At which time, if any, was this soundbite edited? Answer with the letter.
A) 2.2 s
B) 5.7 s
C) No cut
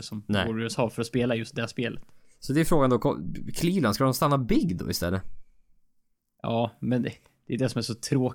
C